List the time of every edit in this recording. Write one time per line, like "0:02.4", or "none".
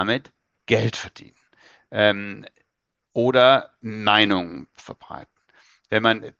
none